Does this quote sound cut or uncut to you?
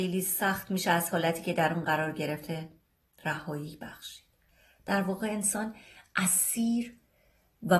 uncut